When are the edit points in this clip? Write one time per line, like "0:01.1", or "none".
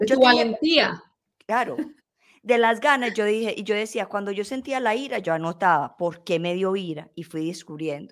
none